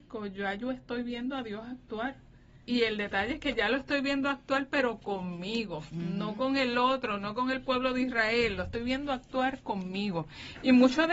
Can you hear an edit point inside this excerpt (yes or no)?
yes